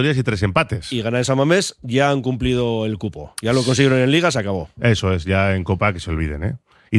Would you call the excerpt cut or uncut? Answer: uncut